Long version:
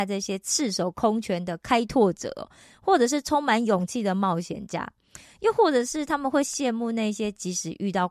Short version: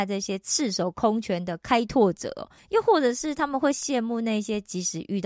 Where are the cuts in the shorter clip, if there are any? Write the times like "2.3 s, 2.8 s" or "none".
2.6 s